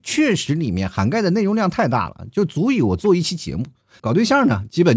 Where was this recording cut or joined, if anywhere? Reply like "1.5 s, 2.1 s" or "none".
4.0 s